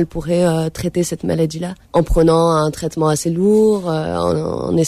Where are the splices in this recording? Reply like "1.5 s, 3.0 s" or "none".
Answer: 1.8 s